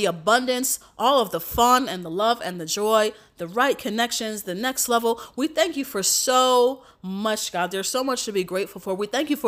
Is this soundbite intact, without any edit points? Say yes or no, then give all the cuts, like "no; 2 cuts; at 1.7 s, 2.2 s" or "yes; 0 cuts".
yes; 0 cuts